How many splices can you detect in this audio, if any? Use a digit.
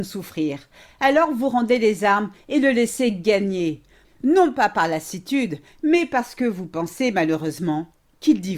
0